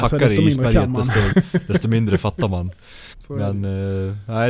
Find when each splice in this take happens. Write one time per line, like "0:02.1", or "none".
0:01.3
0:03.1